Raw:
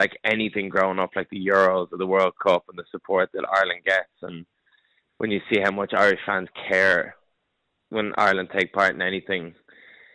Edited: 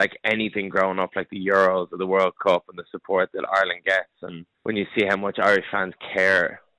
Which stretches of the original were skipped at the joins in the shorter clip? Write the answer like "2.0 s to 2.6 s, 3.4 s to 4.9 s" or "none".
4.5 s to 5.1 s